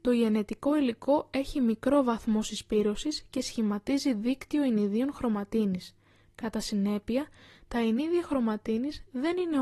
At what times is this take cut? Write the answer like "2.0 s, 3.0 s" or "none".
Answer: none

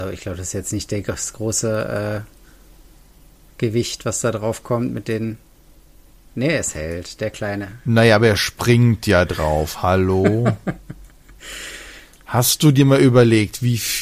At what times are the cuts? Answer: none

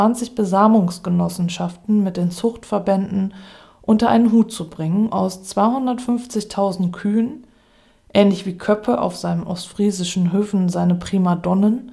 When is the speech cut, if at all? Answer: 5.1 s

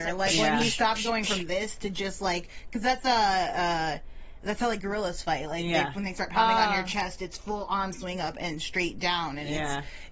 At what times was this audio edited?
none

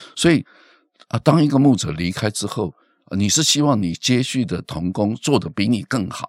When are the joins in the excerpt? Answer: none

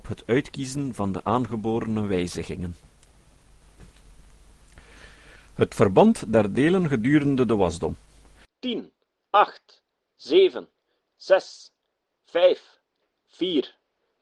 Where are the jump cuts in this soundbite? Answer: 9.2 s

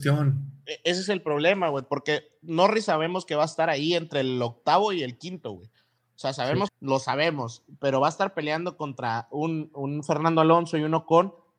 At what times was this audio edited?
6.7 s

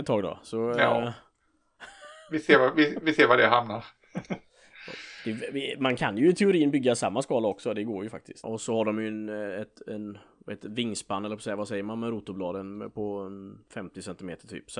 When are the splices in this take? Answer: 8.4 s

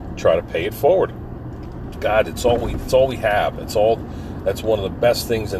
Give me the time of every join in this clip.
1.9 s

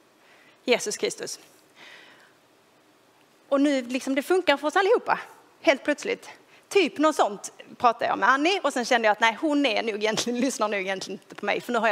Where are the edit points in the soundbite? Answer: none

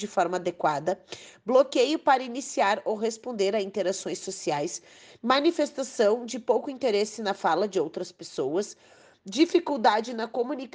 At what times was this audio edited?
none

